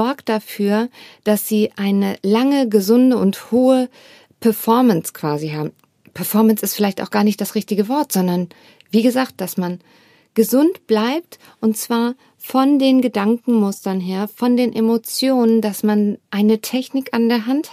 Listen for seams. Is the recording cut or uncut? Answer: uncut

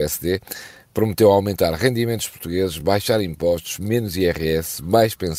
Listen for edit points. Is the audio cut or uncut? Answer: uncut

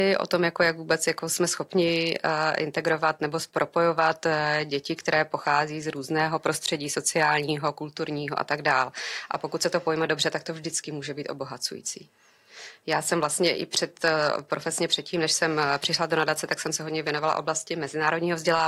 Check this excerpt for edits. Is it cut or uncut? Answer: uncut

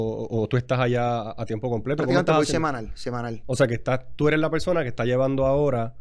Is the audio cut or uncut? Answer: uncut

